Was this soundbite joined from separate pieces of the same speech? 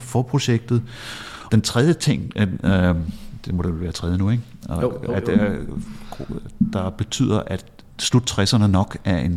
yes; 1 cut; at 1.5 s

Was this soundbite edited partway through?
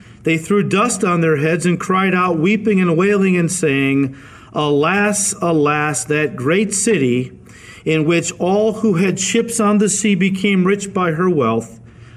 no; 0 cuts

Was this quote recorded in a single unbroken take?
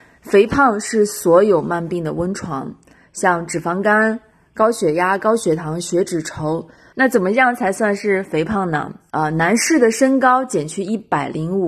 no; 2 cuts; at 6.9 s, 9.1 s

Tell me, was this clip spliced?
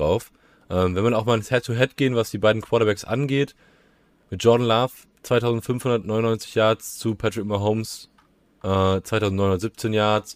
no; 0 cuts

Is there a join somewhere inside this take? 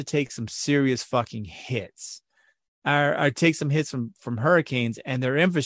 no; 0 cuts

